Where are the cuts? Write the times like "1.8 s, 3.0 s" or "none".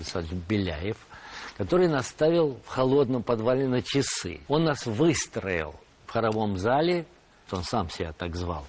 4.5 s, 7.5 s